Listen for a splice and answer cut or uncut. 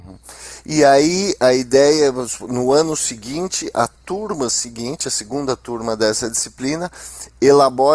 uncut